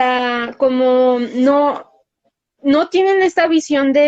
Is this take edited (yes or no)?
no